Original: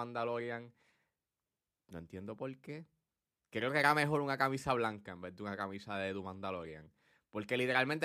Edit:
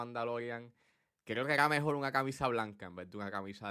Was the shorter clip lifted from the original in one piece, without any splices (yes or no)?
no